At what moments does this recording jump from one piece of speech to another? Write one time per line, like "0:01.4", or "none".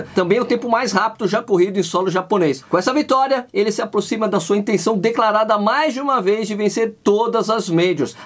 none